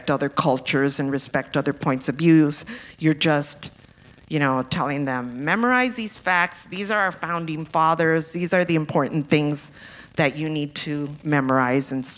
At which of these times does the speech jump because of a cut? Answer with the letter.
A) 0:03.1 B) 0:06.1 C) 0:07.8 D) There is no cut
D